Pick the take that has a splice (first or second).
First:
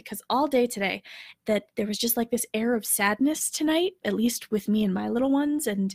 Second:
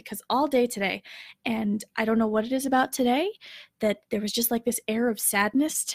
first